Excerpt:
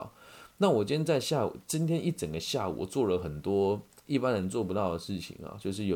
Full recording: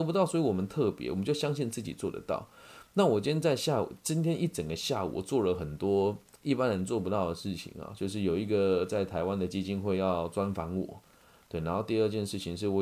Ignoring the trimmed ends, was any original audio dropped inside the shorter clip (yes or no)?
no